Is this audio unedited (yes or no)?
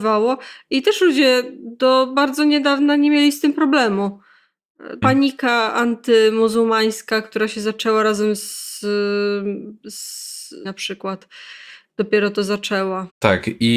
no